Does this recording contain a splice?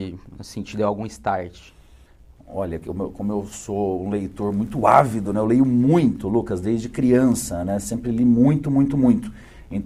no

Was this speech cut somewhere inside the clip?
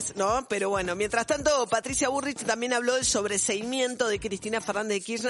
no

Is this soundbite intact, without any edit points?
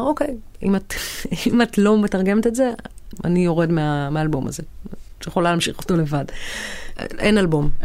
yes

